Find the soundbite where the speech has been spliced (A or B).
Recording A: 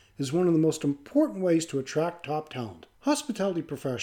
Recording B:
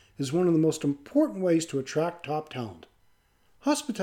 A